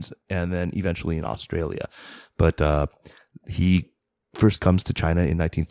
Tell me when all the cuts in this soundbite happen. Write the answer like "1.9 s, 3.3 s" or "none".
none